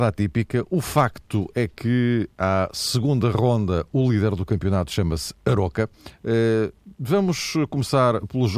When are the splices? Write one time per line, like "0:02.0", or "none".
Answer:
0:06.1